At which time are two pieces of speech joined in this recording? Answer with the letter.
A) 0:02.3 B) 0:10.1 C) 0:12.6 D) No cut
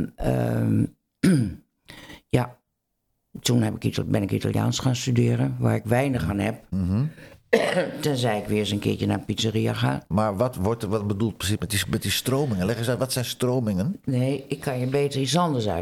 B